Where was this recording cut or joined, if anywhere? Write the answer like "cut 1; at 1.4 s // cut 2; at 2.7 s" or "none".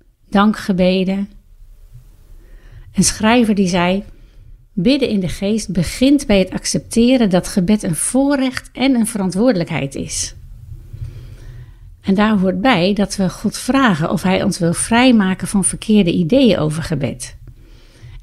none

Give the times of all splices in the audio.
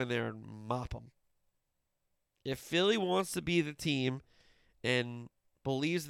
cut 1; at 4.8 s

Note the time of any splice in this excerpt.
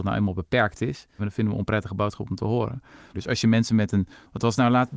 cut 1; at 1.2 s // cut 2; at 3.1 s

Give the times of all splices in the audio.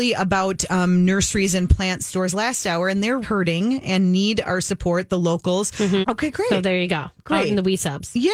cut 1; at 3.2 s // cut 2; at 6.0 s

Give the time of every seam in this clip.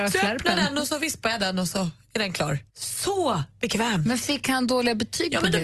cut 1; at 2.7 s

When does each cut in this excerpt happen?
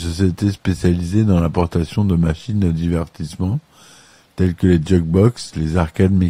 none

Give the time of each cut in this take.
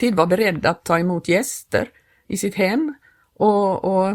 none

